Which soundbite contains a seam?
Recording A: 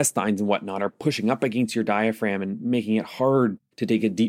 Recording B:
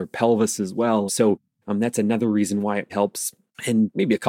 B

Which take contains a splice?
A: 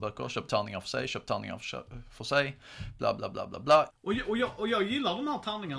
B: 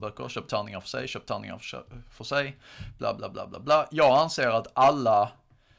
A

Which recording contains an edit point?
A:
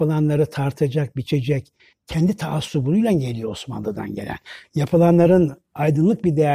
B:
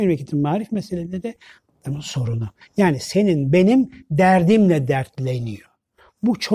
A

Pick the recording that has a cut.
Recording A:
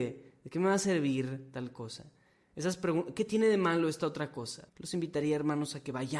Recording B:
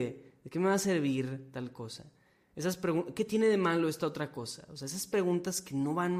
A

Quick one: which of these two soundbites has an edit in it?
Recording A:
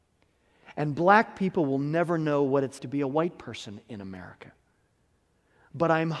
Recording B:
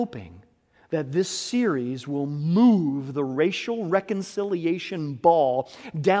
A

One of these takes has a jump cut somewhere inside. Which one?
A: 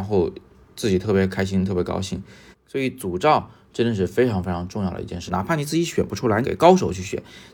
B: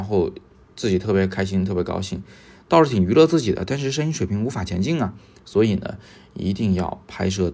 A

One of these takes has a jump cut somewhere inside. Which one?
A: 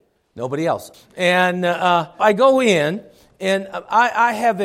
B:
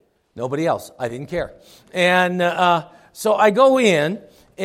A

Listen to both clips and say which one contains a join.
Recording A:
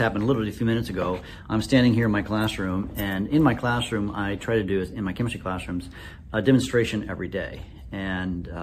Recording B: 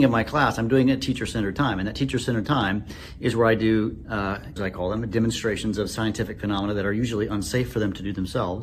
B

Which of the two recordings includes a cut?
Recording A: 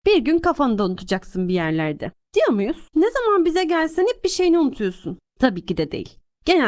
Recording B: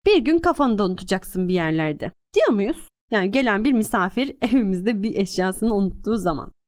A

